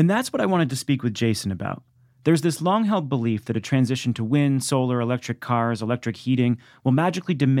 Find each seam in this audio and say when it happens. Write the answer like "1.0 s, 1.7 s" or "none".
none